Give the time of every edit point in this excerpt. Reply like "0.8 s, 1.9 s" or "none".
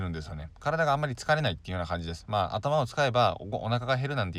none